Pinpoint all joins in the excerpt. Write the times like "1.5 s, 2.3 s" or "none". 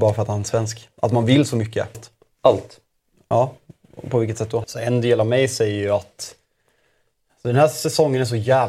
1.9 s, 4.6 s